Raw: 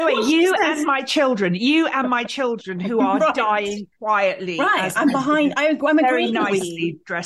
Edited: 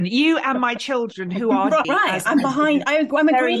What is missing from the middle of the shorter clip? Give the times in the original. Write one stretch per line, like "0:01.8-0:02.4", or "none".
0:03.3-0:04.5

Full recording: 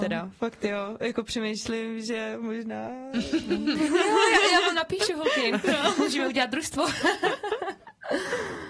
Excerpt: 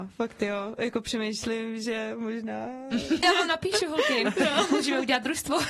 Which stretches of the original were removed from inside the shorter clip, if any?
0:03.4-0:04.5

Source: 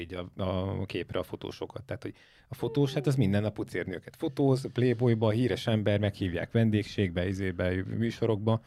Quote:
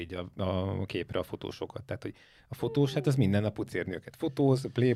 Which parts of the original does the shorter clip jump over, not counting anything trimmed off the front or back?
none

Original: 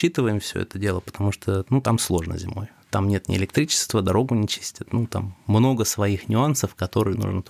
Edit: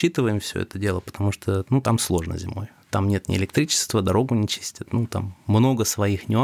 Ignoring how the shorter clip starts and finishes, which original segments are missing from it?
none

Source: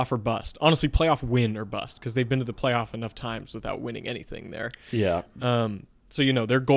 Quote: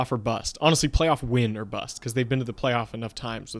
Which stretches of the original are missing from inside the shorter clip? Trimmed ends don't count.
none

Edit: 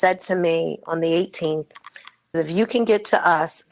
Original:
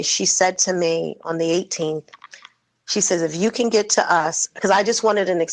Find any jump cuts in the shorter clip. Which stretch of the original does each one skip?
0:02.7-0:03.2

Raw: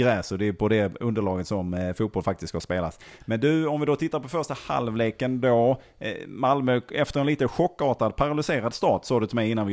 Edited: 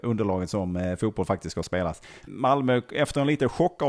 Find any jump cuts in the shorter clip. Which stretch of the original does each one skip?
0:03.2-0:06.3

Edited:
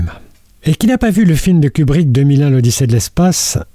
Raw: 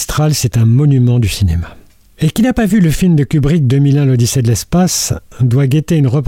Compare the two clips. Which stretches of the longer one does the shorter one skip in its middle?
none

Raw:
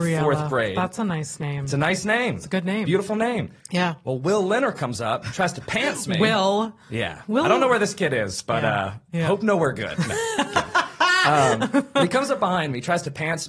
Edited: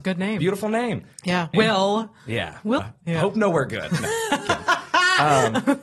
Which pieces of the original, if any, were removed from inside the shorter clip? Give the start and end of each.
0:04.0-0:06.2
0:07.4-0:08.9

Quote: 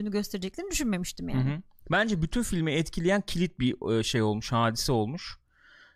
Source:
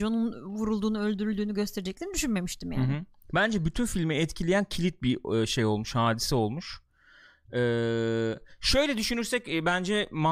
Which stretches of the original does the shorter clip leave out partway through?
none

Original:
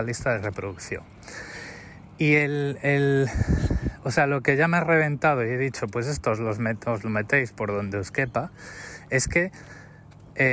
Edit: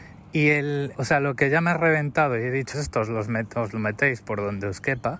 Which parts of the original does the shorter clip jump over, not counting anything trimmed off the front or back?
0:02.8-0:04.0
0:05.8-0:06.0

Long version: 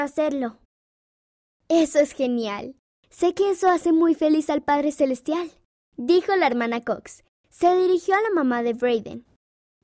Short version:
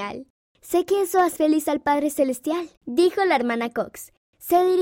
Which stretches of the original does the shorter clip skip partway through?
0:03.8-0:04.2
0:05.6-0:05.9

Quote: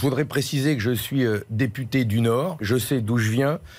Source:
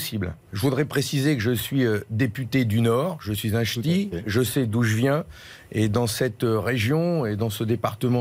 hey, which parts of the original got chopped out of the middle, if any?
0:03.2-0:04.2

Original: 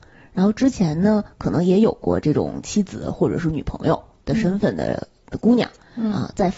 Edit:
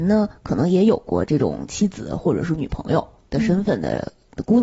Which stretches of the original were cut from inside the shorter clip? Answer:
none

